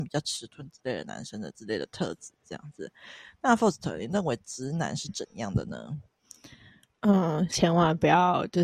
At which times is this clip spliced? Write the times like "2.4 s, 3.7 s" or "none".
7.5 s

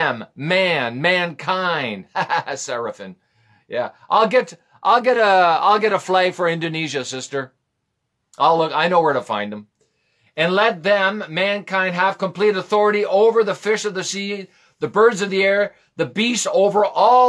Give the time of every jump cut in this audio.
none

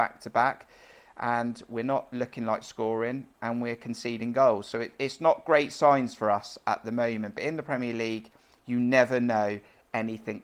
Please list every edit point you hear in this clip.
none

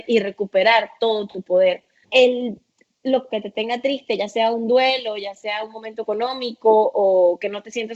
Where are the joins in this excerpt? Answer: 2.0 s, 3.3 s

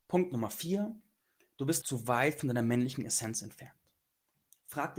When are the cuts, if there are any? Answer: 1.8 s

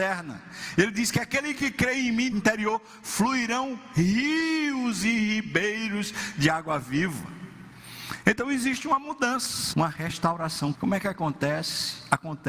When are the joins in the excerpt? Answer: 2.3 s, 9.7 s, 10.7 s

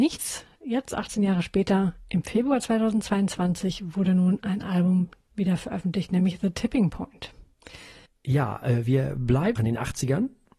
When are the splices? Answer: 8.1 s, 9.6 s

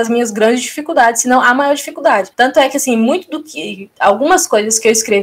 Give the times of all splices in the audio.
2.3 s

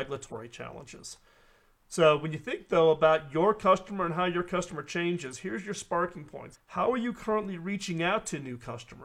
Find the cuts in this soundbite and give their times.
6.5 s

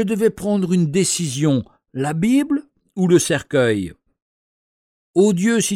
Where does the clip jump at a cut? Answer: none

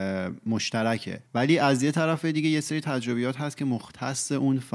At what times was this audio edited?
1.3 s

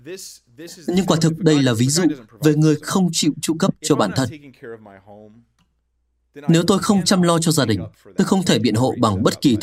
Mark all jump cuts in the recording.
none

